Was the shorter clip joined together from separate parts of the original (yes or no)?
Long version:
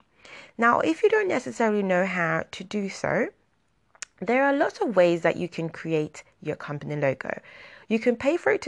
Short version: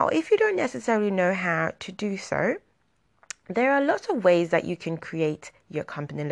no